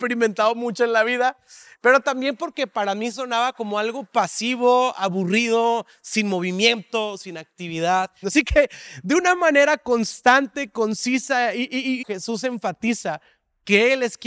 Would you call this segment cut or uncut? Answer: cut